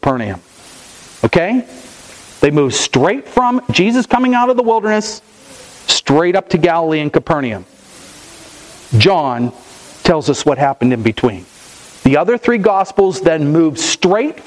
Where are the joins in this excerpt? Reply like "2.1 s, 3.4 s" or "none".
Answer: 12.0 s